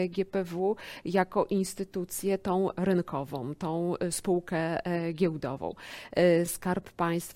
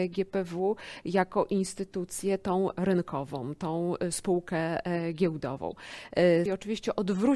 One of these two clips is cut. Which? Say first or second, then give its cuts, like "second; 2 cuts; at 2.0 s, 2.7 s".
second; 1 cut; at 6.5 s